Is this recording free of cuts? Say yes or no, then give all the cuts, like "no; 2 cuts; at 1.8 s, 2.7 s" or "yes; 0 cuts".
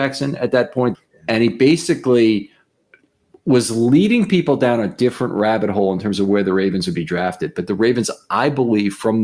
no; 1 cut; at 0.9 s